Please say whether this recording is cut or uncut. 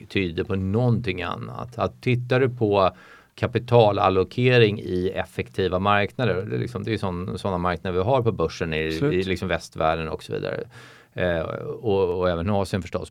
uncut